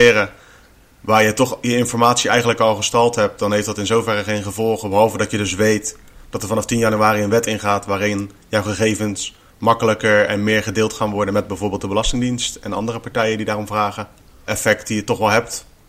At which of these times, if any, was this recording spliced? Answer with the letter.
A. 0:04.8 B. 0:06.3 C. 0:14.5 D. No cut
C